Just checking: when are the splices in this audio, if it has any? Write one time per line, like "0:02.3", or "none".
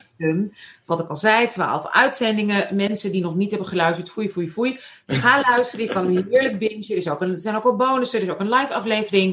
none